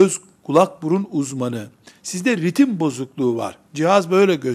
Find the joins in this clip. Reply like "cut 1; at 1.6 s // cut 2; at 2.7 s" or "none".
none